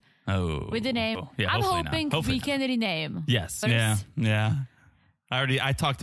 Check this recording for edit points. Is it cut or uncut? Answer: cut